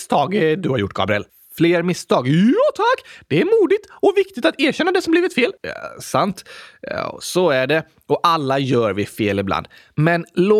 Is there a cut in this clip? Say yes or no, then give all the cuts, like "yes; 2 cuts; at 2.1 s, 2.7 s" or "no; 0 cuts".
yes; 1 cut; at 5.6 s